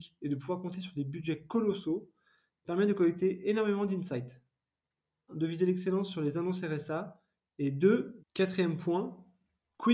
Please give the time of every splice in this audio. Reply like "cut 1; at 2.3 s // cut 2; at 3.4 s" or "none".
cut 1; at 5.3 s // cut 2; at 8.2 s